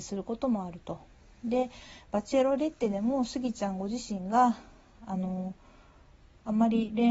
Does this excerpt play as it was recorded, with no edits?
yes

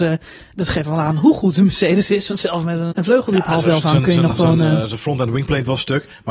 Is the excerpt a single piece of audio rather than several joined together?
no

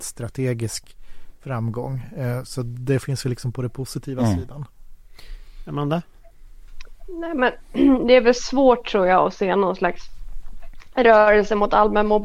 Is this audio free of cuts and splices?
yes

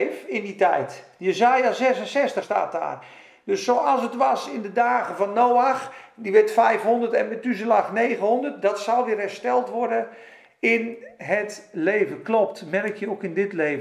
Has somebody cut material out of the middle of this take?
yes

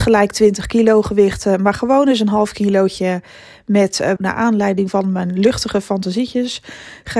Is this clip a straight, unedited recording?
no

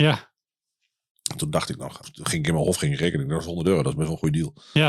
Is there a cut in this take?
yes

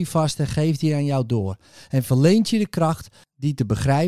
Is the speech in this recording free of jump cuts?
yes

